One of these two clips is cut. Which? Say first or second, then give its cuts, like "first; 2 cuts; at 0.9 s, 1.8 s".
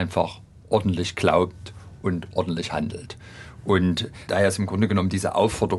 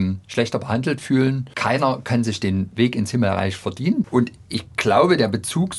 second; 2 cuts; at 1.5 s, 4.0 s